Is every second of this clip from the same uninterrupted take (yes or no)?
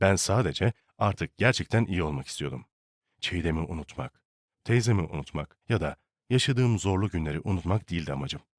no